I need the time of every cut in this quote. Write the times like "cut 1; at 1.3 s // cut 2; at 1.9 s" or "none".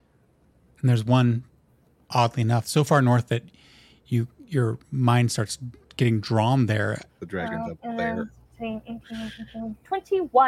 cut 1; at 2.6 s // cut 2; at 7.1 s